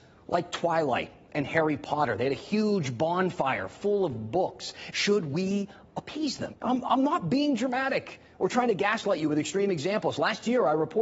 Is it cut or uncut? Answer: cut